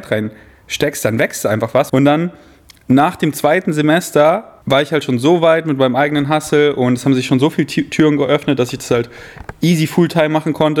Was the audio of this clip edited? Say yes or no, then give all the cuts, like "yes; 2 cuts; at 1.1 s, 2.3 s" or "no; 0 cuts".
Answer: yes; 2 cuts; at 1.9 s, 4.6 s